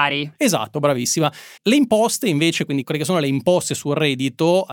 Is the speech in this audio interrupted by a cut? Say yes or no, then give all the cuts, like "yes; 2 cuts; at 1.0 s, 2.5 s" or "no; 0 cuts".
yes; 1 cut; at 1.6 s